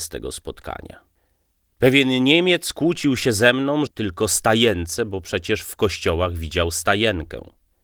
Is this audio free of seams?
no; 1 cut; at 3.9 s

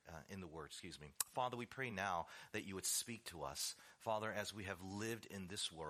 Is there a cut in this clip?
no; 0 cuts

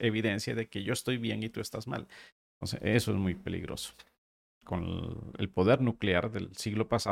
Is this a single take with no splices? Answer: no; 1 cut; at 4.5 s

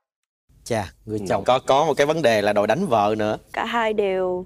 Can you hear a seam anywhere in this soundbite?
yes; 1 cut; at 1.4 s

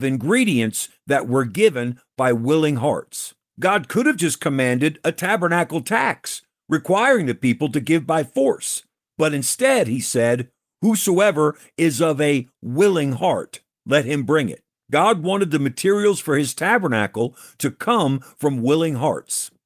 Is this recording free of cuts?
yes; 0 cuts

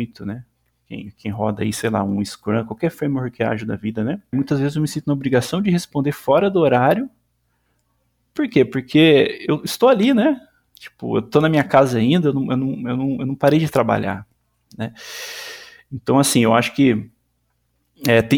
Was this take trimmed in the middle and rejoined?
yes; 1 cut; at 4.3 s

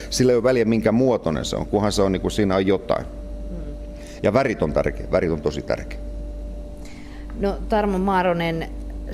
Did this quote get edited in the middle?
no; 0 cuts

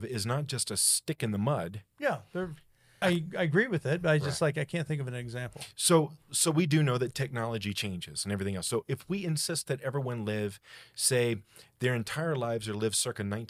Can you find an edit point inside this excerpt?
yes; 1 cut; at 3.0 s

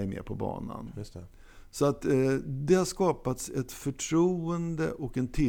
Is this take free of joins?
yes; 0 cuts

